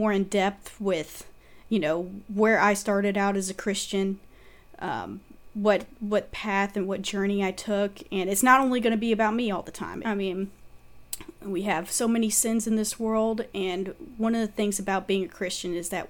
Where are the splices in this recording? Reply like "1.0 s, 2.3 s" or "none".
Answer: 10.0 s